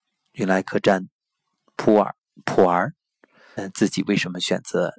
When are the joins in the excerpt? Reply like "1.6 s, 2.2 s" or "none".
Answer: 3.6 s